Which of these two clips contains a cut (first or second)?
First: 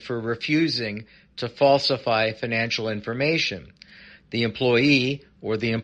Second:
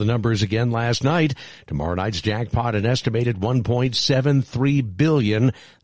first